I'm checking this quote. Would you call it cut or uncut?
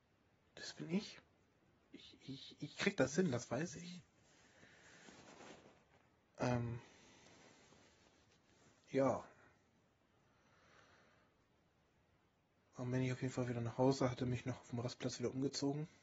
uncut